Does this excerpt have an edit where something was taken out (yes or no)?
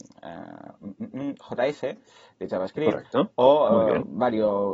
no